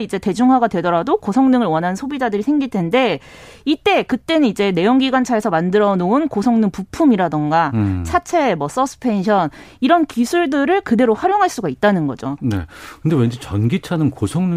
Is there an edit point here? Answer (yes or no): yes